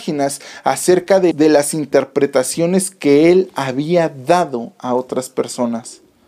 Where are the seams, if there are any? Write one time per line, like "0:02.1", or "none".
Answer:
0:01.3